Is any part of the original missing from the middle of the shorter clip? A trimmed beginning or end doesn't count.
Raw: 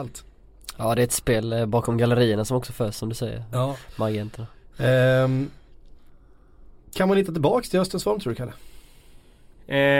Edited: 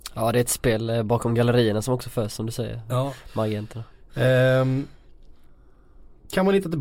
no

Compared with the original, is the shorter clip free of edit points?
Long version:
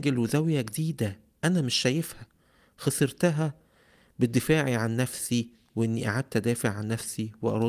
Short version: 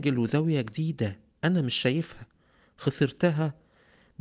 yes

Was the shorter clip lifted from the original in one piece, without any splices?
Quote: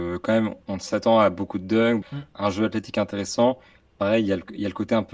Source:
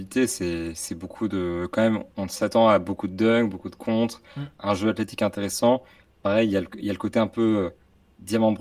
no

